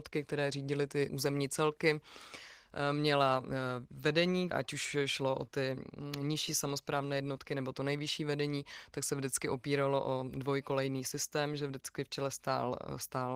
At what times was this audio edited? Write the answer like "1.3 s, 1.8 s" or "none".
1.1 s, 4.5 s